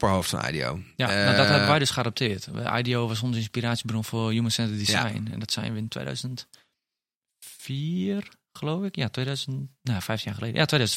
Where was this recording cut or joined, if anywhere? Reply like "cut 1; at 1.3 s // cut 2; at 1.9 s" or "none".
none